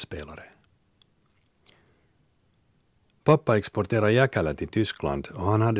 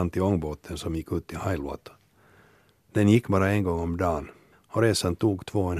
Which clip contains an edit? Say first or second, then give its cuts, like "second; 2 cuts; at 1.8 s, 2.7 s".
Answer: second; 1 cut; at 4.5 s